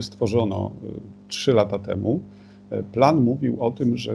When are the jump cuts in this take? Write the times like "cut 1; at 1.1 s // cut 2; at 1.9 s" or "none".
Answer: none